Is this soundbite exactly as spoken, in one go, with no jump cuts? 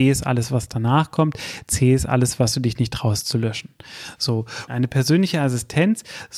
no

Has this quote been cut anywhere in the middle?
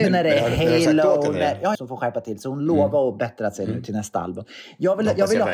yes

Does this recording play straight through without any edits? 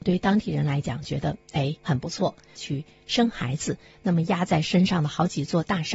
no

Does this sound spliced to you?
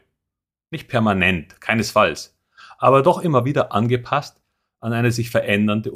no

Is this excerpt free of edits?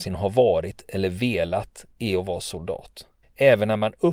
no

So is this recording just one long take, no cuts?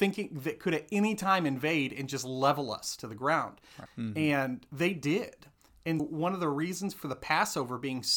no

